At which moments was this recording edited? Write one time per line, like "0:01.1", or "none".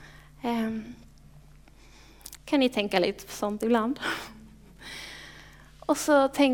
0:02.4